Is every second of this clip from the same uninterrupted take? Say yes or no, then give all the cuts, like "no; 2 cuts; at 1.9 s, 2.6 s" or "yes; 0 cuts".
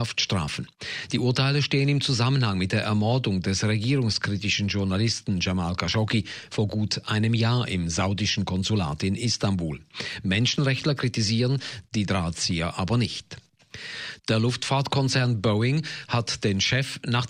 no; 1 cut; at 11.9 s